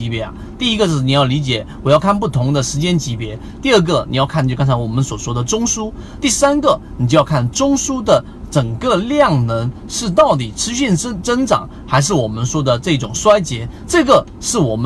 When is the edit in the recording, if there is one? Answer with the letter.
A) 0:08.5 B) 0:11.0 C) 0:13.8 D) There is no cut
C